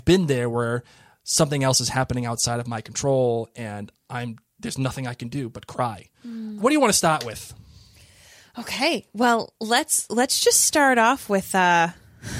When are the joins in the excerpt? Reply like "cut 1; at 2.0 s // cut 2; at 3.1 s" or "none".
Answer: cut 1; at 6.6 s